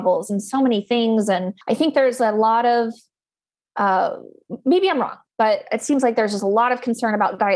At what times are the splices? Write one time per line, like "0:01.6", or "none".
0:01.6